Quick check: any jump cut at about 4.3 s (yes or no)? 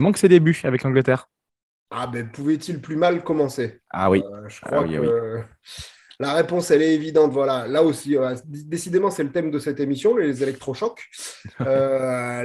no